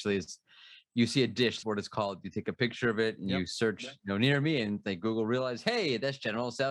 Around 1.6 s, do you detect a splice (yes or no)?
yes